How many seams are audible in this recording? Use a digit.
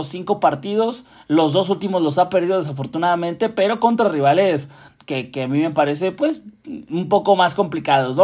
0